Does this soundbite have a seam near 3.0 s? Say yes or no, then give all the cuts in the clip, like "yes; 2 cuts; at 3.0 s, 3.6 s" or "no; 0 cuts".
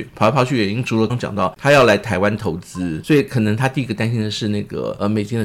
yes; 2 cuts; at 1.1 s, 3.0 s